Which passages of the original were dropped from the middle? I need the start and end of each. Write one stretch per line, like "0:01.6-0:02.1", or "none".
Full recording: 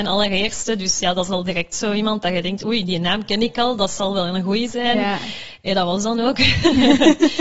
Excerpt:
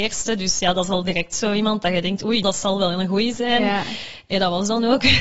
0:02.8-0:03.8